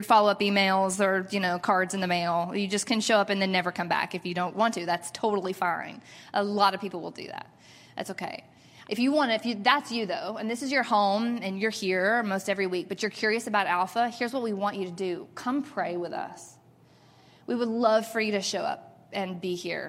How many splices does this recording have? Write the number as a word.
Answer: one